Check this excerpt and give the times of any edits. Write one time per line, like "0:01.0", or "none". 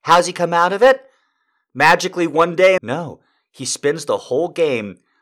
0:02.8